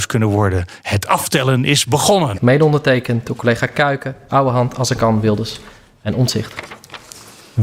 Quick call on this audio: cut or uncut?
cut